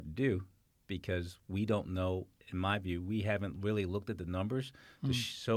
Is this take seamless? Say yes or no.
yes